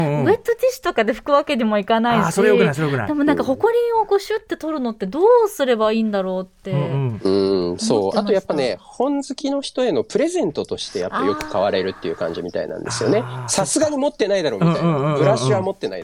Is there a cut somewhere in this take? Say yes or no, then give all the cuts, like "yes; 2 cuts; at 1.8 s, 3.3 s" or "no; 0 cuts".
no; 0 cuts